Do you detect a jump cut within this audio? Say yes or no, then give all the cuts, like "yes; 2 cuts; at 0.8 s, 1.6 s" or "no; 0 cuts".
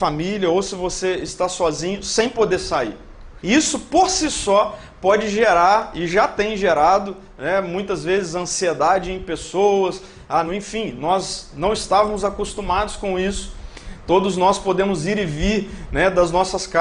yes; 2 cuts; at 3.4 s, 10.4 s